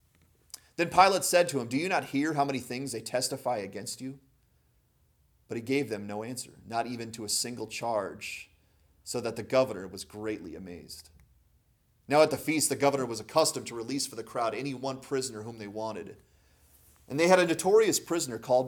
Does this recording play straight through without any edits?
yes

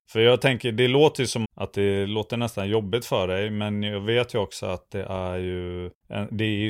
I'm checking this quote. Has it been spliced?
yes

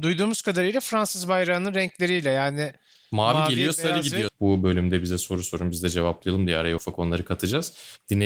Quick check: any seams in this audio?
yes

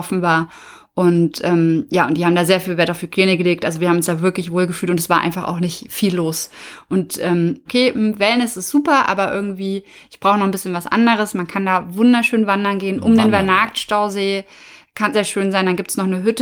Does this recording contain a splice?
yes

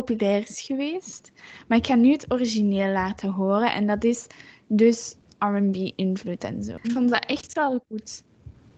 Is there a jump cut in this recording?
yes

